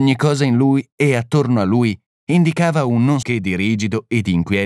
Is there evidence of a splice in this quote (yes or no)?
yes